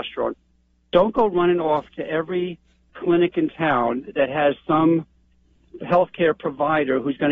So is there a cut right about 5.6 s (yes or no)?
no